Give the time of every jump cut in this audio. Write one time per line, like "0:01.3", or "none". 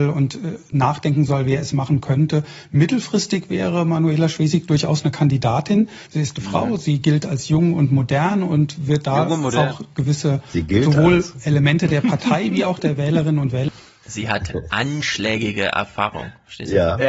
0:06.1